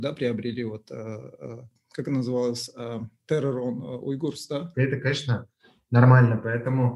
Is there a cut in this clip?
yes; 1 cut; at 4.7 s

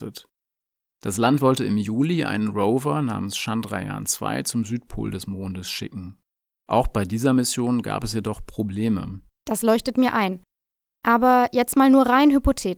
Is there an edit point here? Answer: yes; 1 cut; at 9.3 s

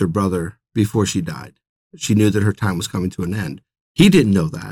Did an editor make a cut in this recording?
no; 0 cuts

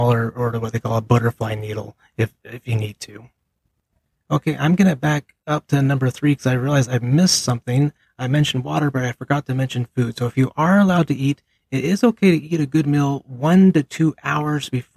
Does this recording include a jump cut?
no; 0 cuts

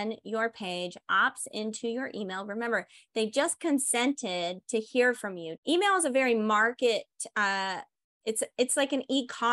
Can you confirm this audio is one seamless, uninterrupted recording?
yes; 0 cuts

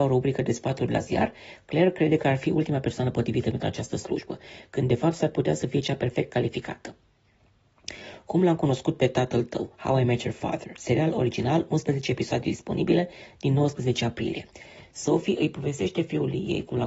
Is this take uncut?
yes; 0 cuts

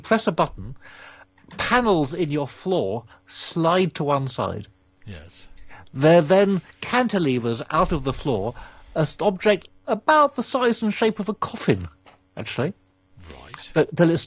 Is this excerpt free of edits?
yes; 0 cuts

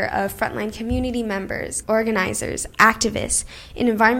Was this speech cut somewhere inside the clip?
yes; 1 cut; at 1.8 s

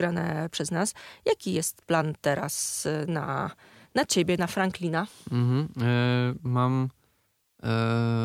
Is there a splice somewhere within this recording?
no; 0 cuts

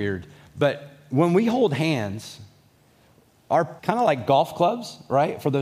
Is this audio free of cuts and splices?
no; 1 cut; at 3.8 s

